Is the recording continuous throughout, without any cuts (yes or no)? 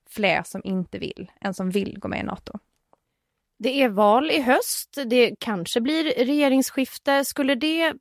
yes